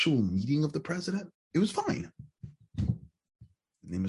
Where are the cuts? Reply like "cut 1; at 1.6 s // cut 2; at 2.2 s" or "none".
cut 1; at 1.3 s // cut 2; at 2.6 s